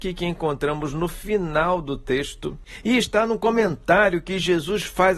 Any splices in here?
no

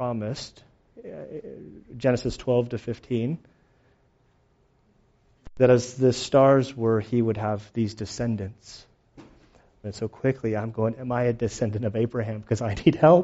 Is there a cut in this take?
yes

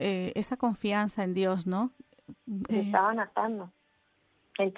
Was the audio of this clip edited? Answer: yes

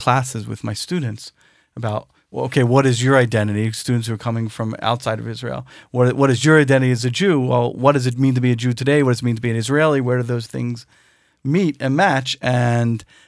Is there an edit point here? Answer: no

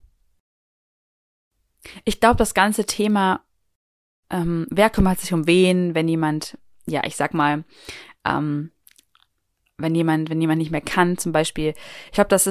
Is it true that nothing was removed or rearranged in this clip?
yes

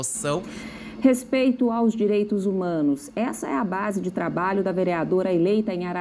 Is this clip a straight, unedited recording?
yes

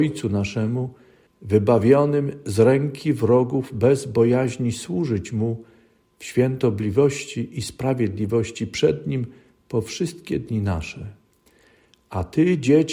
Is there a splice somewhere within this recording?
yes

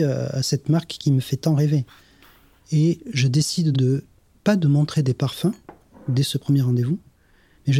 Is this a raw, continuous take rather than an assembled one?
no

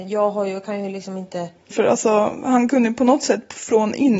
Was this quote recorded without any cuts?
no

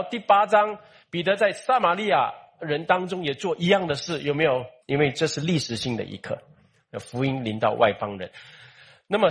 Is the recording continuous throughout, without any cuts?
no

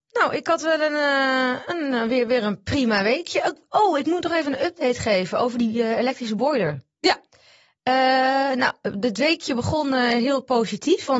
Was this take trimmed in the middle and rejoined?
no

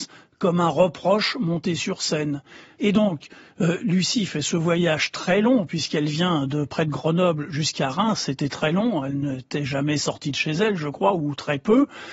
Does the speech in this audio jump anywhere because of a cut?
yes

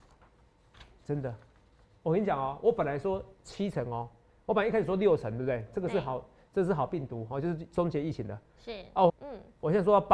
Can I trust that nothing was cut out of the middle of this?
no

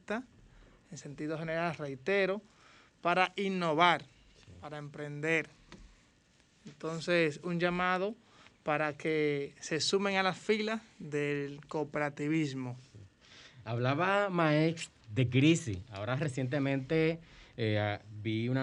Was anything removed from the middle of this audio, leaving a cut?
no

